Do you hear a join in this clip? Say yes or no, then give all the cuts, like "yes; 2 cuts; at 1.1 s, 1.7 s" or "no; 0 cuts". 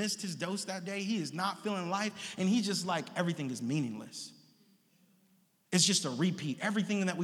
no; 0 cuts